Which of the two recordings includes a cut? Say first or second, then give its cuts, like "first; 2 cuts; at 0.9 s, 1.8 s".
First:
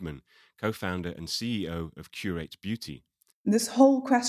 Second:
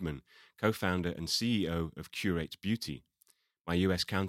first; 1 cut; at 3.3 s